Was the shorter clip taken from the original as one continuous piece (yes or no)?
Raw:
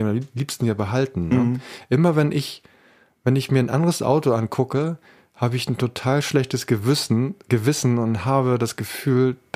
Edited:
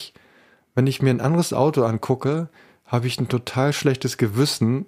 yes